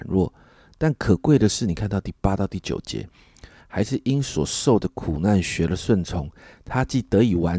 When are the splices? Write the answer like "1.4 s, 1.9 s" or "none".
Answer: 3.6 s